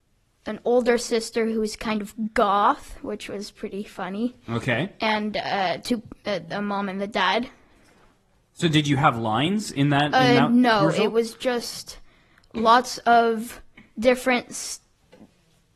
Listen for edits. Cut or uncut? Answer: uncut